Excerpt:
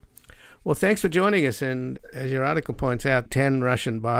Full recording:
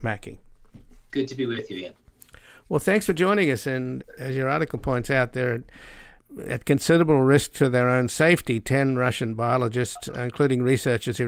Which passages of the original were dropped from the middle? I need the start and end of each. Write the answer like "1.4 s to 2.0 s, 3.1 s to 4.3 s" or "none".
5.3 s to 8.6 s